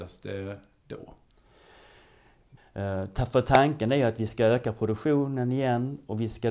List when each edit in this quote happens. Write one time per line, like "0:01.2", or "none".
0:02.6